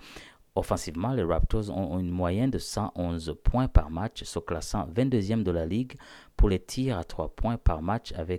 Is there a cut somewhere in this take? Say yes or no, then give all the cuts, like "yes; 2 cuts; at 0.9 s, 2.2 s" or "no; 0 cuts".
no; 0 cuts